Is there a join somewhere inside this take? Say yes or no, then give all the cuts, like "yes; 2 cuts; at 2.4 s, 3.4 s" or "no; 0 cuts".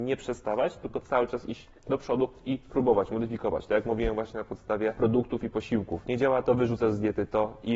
yes; 1 cut; at 6.4 s